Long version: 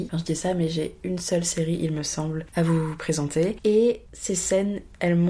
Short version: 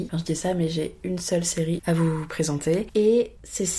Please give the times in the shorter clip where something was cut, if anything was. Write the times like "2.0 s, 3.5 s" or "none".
1.8 s